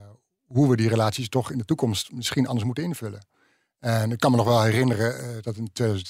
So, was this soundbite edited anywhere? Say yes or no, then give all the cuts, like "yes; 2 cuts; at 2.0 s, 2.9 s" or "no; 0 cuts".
no; 0 cuts